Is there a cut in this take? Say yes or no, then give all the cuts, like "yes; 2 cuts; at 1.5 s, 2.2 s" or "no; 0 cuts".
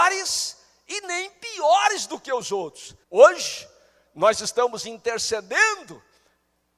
yes; 1 cut; at 3.0 s